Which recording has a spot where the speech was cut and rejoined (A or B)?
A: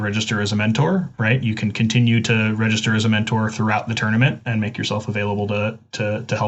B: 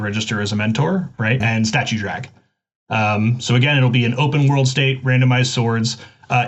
B